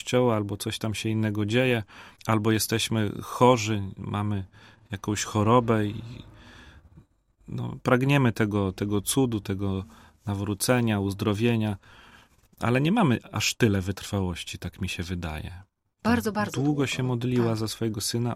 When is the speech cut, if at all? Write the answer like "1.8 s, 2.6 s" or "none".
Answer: 2.2 s, 16.0 s